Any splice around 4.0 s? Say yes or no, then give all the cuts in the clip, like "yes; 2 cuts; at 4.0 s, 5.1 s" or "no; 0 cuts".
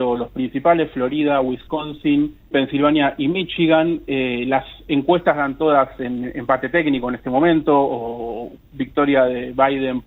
no; 0 cuts